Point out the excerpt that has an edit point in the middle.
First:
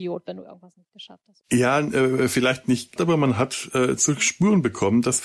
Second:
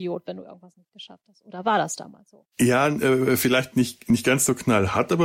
first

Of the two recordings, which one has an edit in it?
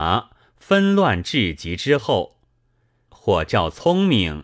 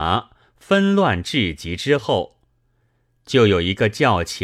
first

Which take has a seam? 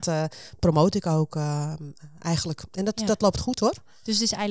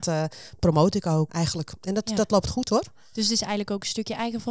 second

